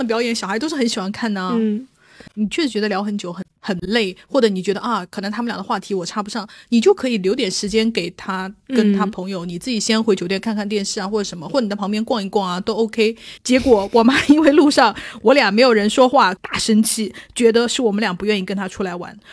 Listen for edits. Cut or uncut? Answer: cut